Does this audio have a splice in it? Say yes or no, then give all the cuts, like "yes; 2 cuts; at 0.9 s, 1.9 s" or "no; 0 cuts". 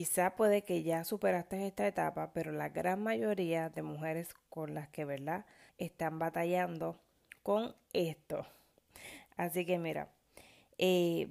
yes; 1 cut; at 5.7 s